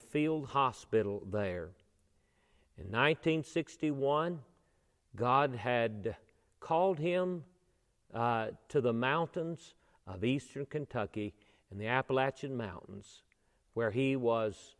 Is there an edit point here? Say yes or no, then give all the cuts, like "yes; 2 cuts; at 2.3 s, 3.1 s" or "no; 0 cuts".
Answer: no; 0 cuts